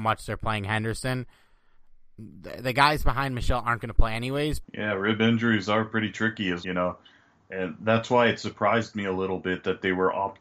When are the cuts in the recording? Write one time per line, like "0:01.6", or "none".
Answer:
0:04.6
0:06.6